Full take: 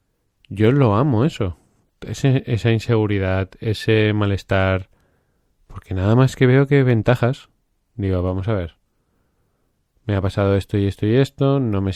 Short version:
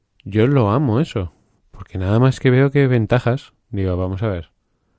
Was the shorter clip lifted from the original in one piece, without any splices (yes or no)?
no